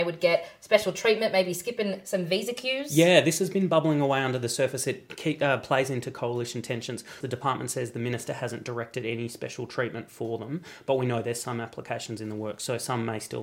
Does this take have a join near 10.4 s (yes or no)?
no